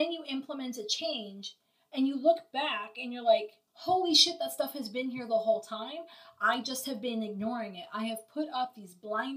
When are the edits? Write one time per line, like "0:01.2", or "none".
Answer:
0:03.7